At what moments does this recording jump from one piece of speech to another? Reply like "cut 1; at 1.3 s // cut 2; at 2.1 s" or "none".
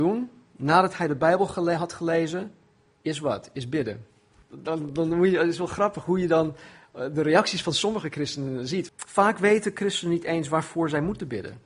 cut 1; at 4.4 s // cut 2; at 8.9 s